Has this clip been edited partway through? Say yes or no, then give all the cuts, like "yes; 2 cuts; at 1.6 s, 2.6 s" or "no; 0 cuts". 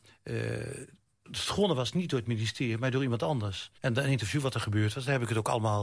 yes; 1 cut; at 3.8 s